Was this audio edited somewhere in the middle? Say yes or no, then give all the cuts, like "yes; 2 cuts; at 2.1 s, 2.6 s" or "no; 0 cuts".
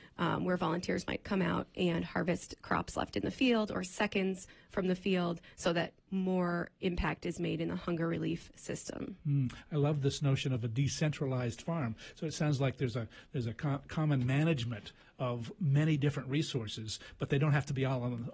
no; 0 cuts